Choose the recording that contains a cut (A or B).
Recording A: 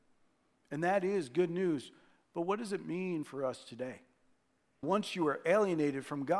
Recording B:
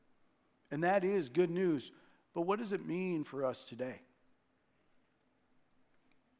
A